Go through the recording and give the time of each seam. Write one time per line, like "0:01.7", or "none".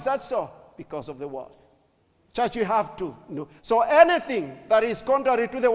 0:02.2
0:03.6